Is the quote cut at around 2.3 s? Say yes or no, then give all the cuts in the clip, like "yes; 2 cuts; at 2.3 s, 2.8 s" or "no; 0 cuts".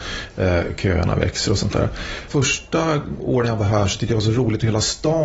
yes; 1 cut; at 2.3 s